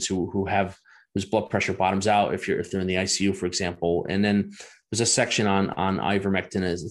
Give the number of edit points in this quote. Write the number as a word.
zero